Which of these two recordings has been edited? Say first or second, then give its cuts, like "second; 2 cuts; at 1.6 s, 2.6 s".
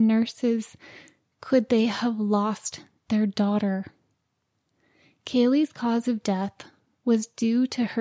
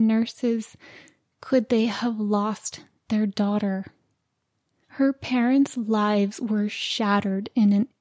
second; 1 cut; at 4.8 s